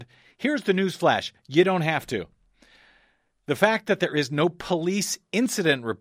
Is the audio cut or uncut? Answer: uncut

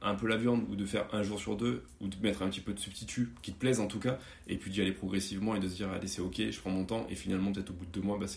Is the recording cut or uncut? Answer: uncut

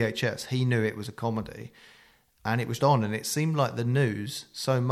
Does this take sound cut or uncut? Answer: cut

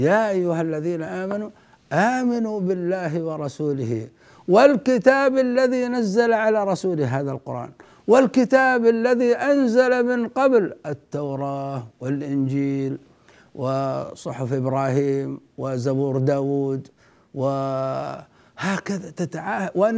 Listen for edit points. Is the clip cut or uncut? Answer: uncut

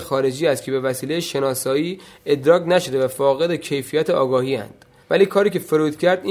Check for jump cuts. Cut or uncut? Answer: cut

